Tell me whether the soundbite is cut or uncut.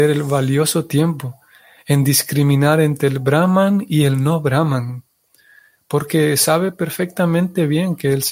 uncut